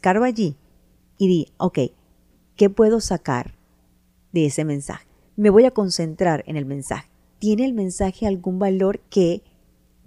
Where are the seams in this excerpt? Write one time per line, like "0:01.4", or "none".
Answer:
0:09.1

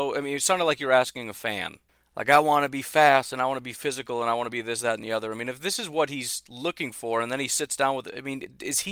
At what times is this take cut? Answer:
none

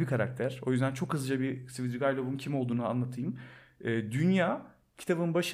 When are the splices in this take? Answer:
none

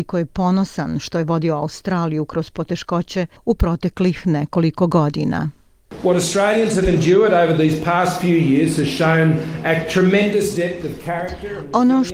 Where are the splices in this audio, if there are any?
none

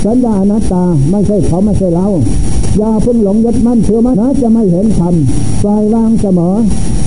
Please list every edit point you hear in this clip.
0:04.1

